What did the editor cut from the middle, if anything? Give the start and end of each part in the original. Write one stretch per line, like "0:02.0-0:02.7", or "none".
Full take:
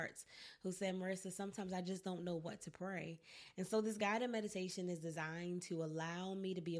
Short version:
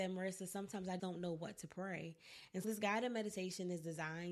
0:01.8-0:02.0
0:03.7-0:03.8

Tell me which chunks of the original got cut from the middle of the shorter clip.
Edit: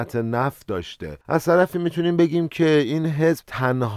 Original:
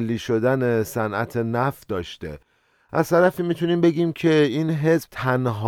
0:02.4-0:02.9

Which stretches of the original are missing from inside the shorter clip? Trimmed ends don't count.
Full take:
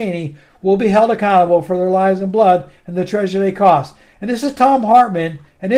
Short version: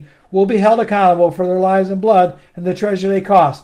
none

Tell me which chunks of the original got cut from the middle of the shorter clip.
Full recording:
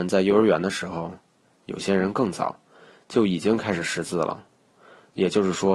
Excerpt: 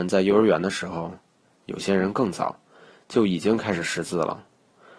none

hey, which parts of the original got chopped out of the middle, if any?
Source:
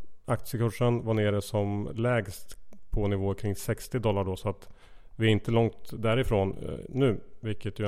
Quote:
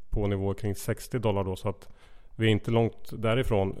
none

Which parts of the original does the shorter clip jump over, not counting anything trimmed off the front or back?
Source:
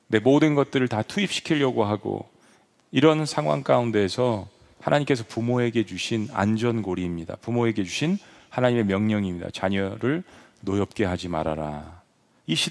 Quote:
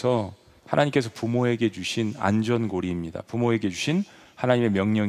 none

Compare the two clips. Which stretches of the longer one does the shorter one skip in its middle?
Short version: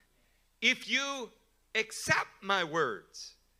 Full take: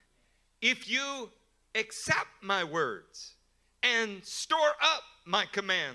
none

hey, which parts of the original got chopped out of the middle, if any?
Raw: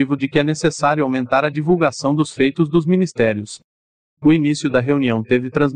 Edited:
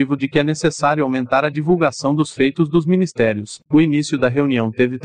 0:03.6-0:04.2

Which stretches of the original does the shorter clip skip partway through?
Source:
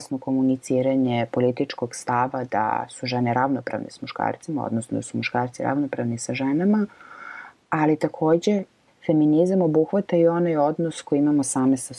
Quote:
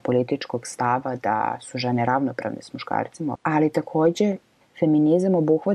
0:04.6-0:07.6

